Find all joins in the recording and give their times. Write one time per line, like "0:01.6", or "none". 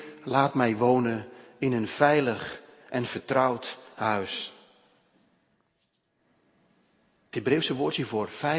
none